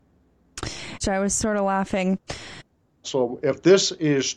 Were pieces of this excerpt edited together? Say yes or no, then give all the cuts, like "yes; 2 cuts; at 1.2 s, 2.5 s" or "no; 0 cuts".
yes; 2 cuts; at 1.0 s, 3.0 s